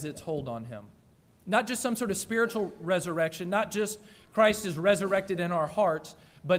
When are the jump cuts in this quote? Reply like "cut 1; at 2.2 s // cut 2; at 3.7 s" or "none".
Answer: none